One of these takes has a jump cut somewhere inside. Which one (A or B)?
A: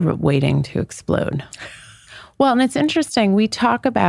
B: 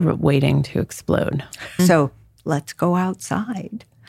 B